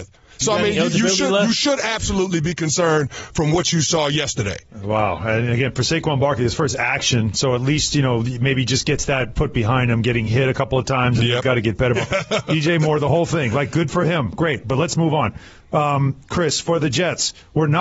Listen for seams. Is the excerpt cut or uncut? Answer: cut